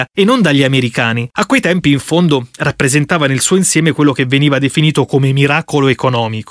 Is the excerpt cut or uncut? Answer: cut